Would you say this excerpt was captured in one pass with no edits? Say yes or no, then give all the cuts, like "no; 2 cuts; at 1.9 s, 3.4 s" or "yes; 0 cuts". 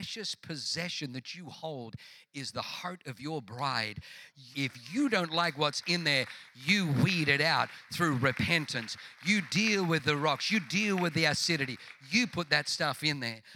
no; 1 cut; at 4.5 s